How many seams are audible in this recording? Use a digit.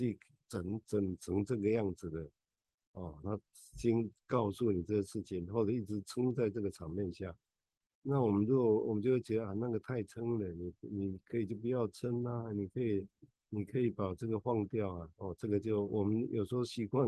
1